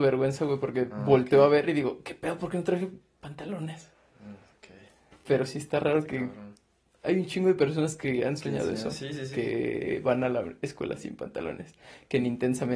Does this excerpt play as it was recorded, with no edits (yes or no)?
yes